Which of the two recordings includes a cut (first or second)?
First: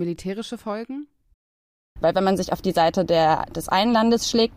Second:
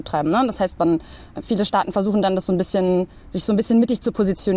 first